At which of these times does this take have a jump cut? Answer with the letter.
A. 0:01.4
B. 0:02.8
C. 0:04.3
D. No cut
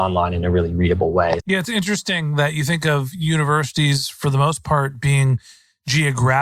A